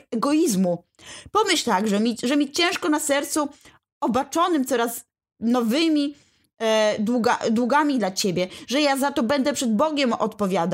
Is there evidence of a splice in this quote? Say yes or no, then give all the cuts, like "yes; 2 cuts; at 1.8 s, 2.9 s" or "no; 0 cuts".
no; 0 cuts